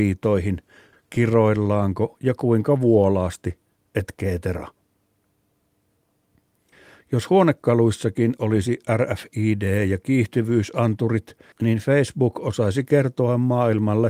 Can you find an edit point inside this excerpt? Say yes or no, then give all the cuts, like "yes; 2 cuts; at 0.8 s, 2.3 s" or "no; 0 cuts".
yes; 2 cuts; at 0.9 s, 11.5 s